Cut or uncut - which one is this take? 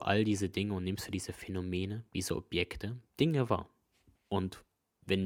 cut